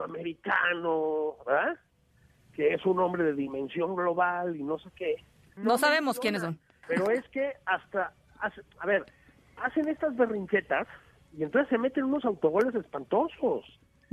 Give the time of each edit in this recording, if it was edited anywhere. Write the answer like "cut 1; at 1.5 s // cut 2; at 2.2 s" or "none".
cut 1; at 5.6 s // cut 2; at 6.8 s